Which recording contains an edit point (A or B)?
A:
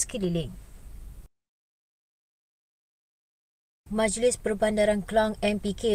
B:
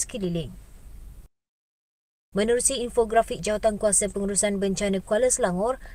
B